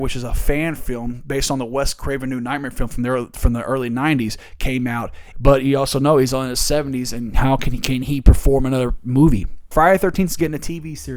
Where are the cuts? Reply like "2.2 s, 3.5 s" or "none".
5.3 s, 9.7 s